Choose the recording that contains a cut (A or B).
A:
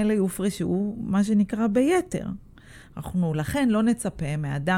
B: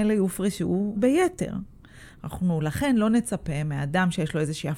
B